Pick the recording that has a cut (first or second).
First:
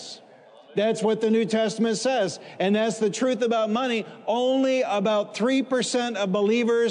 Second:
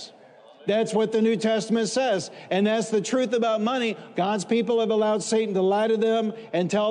second